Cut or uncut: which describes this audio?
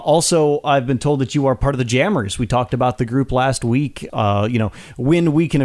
cut